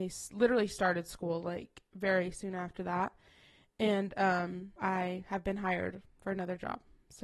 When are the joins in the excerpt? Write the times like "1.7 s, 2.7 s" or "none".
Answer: 4.8 s